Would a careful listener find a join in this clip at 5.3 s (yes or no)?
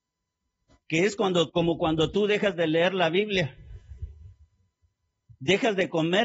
no